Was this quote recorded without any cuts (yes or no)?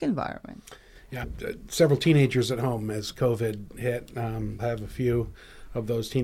no